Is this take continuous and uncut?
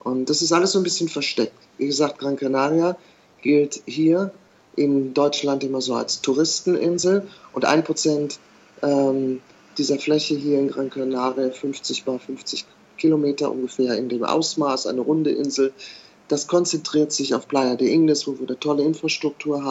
yes; 0 cuts

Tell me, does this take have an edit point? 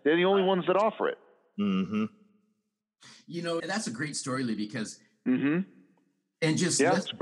yes; 2 cuts; at 3.6 s, 5.3 s

